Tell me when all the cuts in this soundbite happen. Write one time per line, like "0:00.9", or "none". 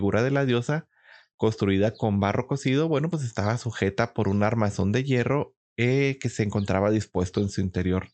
none